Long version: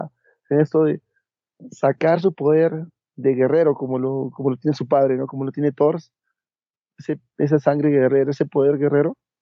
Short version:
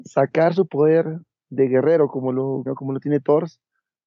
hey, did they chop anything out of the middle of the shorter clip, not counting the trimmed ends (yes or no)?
yes